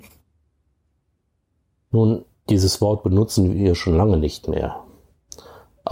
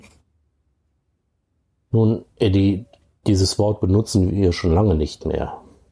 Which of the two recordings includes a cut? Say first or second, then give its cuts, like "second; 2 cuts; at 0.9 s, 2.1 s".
first; 1 cut; at 2.3 s